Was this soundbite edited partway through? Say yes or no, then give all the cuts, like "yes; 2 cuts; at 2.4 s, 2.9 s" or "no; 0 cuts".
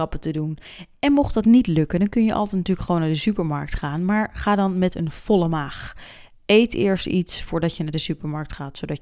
no; 0 cuts